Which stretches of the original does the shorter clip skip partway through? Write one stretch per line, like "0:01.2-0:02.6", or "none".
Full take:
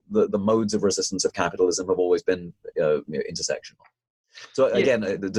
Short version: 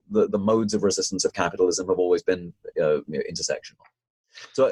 none